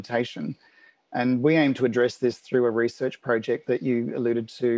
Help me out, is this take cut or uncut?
uncut